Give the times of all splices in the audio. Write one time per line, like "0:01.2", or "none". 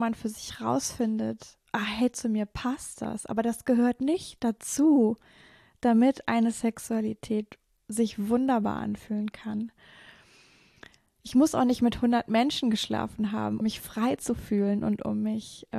0:13.6